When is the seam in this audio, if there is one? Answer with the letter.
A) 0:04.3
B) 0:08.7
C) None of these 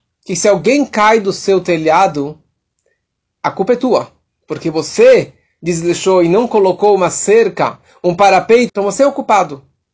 B